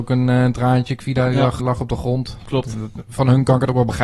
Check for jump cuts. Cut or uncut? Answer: cut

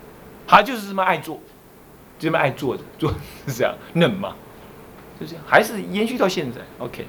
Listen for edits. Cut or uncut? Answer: uncut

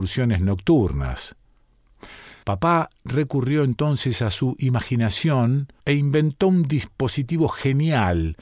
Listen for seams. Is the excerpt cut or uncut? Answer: cut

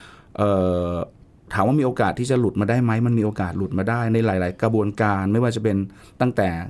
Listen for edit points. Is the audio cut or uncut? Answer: uncut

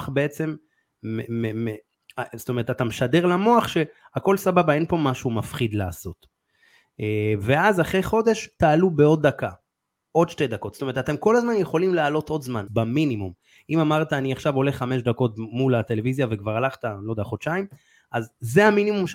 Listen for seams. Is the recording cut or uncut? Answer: cut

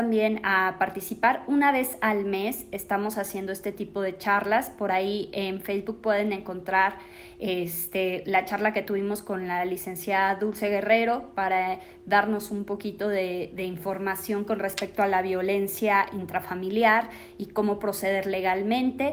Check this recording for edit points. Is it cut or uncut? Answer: uncut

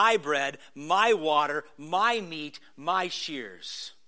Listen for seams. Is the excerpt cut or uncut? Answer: uncut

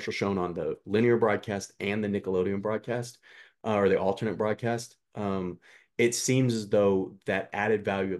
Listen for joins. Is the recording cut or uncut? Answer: uncut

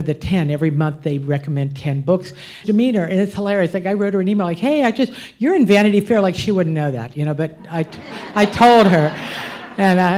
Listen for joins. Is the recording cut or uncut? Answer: cut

